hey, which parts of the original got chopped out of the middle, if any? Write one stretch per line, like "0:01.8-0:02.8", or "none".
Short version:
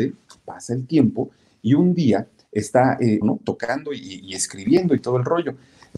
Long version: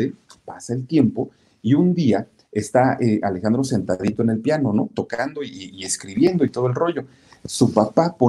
0:03.2-0:04.7